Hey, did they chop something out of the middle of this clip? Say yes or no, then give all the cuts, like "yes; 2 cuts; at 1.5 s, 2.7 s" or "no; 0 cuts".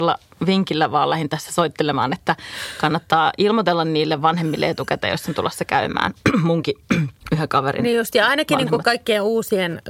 yes; 1 cut; at 7.2 s